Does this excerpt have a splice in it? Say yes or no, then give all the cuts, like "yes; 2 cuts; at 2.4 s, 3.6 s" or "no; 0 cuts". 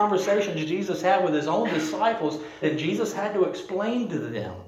yes; 1 cut; at 2.6 s